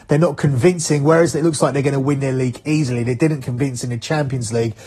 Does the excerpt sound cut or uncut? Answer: uncut